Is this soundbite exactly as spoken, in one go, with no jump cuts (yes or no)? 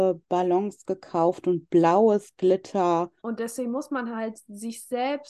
no